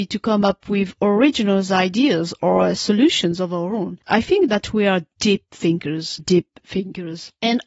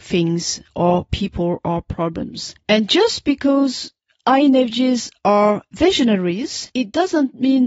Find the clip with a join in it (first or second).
first